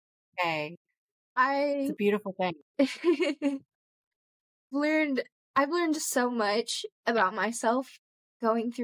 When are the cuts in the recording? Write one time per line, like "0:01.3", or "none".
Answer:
none